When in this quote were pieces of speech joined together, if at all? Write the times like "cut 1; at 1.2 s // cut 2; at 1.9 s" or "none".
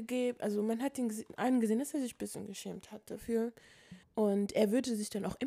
cut 1; at 4.0 s